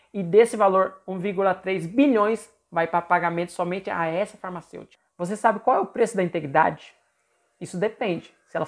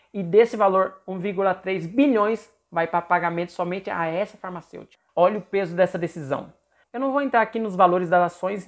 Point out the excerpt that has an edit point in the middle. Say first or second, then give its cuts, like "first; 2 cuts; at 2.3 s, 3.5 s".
second; 2 cuts; at 5.1 s, 6.8 s